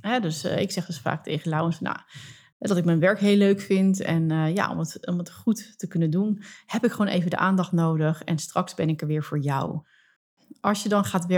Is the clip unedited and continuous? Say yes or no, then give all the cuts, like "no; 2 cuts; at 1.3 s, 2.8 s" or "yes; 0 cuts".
yes; 0 cuts